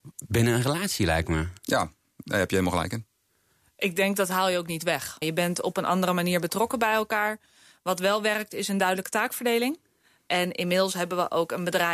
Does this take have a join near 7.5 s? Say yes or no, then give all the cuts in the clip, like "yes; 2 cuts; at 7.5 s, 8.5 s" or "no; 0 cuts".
no; 2 cuts; at 5.2 s, 10.2 s